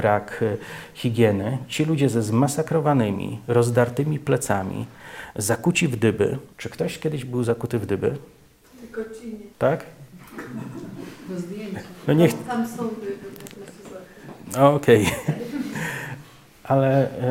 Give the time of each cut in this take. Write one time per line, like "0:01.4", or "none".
0:06.5
0:09.5
0:12.0